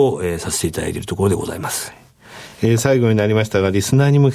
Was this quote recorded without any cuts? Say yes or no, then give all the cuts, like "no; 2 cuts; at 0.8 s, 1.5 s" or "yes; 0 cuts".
yes; 0 cuts